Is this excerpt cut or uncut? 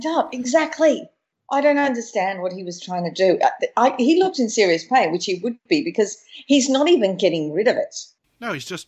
uncut